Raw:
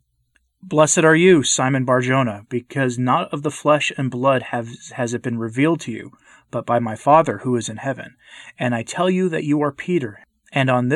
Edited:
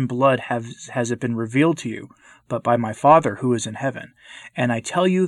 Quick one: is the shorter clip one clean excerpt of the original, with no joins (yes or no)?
yes